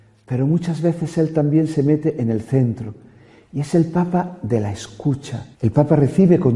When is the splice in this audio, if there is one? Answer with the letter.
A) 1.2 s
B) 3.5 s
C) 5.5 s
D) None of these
C